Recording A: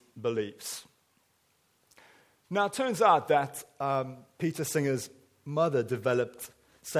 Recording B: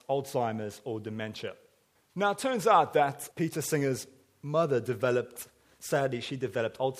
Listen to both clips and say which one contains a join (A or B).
B